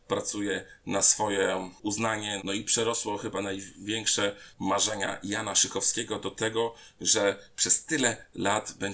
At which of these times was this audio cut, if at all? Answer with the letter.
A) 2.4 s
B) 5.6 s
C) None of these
A